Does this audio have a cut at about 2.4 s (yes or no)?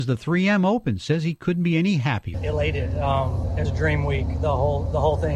no